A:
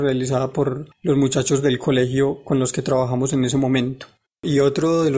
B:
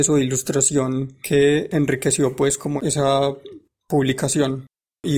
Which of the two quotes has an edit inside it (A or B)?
A